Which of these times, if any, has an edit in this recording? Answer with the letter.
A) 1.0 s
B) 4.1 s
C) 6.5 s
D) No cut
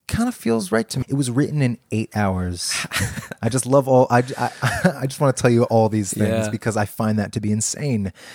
A